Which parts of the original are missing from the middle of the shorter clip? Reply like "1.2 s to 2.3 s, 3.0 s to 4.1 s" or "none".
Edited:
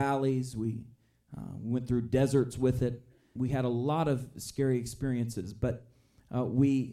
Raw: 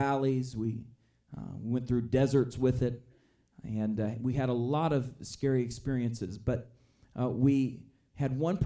3.4 s to 4.2 s

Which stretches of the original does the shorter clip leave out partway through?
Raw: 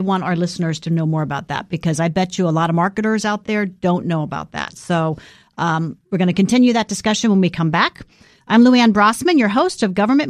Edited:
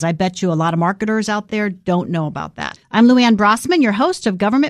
4.7 s to 8.3 s

